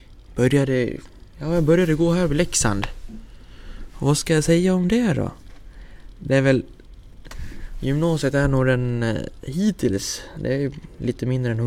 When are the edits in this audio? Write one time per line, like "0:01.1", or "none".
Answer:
none